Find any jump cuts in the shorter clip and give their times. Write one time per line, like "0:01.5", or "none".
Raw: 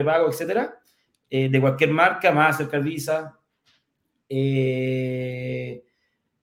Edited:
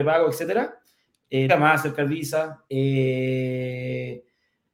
0:01.5
0:02.7